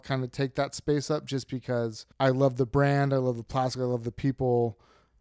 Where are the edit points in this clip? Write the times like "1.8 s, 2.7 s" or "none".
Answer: 2.1 s